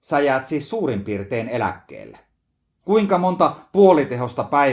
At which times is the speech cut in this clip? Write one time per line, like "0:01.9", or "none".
0:02.8